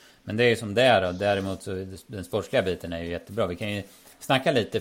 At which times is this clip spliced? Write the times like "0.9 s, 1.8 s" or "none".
none